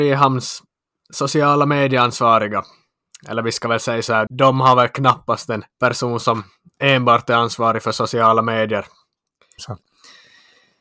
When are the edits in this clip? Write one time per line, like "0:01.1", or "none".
0:04.3
0:05.7
0:09.6